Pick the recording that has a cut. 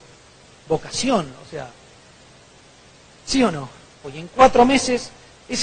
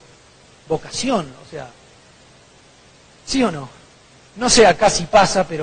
first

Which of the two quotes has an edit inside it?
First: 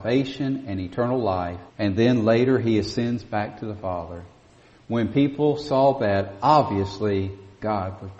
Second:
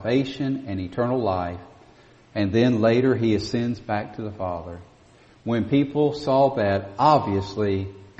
first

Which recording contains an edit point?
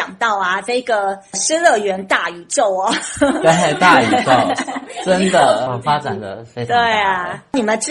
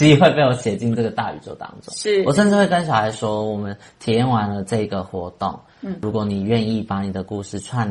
first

